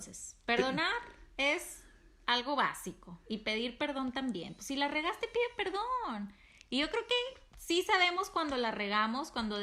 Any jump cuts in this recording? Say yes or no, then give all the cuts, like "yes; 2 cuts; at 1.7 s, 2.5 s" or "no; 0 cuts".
no; 0 cuts